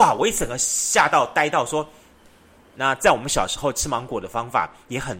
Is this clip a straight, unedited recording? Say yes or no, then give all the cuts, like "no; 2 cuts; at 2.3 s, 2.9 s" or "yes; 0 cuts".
no; 1 cut; at 2.7 s